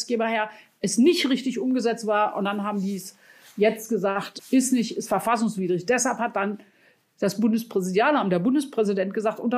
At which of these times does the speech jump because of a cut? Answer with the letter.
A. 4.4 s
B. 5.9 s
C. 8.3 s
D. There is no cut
A